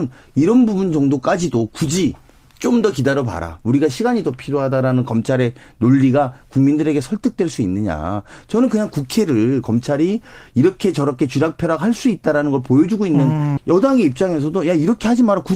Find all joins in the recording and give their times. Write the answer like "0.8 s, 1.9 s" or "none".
13.6 s

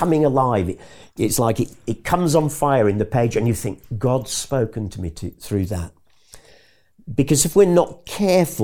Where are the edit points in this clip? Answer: 6.9 s

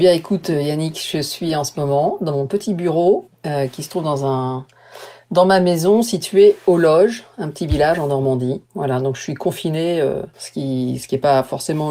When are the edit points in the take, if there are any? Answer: 8.7 s, 10.3 s

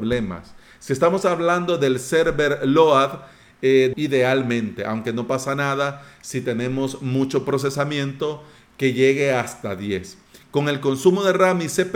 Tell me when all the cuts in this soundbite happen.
3.9 s

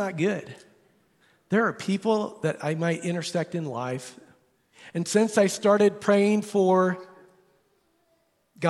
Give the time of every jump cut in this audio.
none

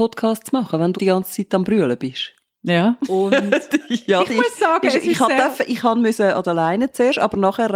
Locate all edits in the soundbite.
0.9 s, 3.0 s

